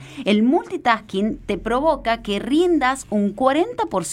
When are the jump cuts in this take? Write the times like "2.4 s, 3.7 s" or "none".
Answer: none